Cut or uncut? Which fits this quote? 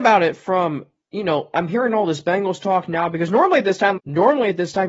cut